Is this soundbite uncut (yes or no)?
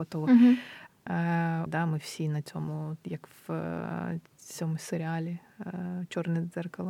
no